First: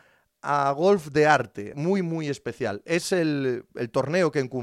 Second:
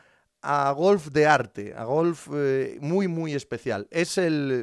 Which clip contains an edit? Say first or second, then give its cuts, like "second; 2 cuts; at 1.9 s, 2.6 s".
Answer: first; 1 cut; at 1.7 s